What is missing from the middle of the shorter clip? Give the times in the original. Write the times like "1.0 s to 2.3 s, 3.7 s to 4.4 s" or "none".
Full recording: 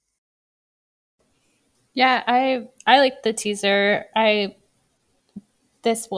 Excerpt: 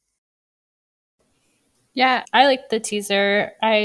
2.2 s to 2.8 s